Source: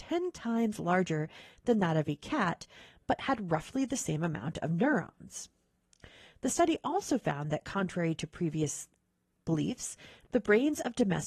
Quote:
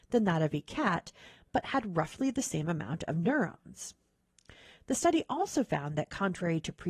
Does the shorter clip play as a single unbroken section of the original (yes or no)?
yes